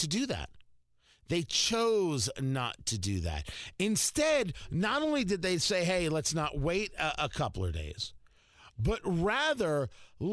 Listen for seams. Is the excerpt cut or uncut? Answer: uncut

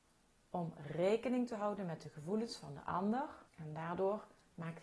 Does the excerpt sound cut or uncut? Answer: cut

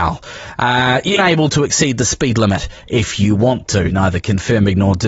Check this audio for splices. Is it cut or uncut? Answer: cut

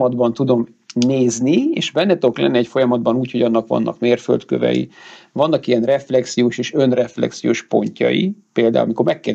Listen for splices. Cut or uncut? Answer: uncut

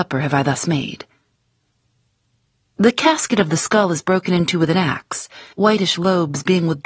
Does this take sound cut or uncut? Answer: cut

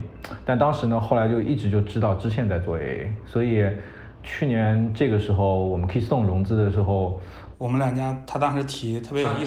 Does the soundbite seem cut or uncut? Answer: cut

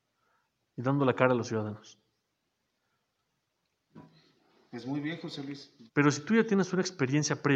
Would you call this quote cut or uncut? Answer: cut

